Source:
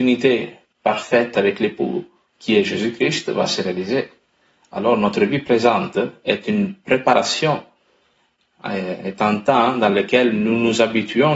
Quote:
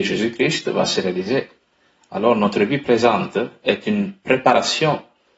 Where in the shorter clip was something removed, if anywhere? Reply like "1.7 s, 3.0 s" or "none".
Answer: none